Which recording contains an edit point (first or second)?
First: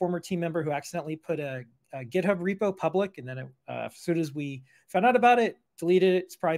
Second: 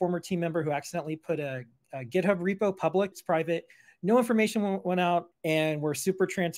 second